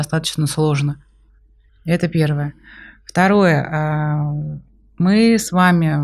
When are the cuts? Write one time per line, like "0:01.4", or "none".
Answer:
0:01.7